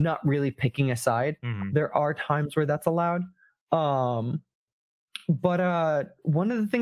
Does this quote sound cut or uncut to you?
uncut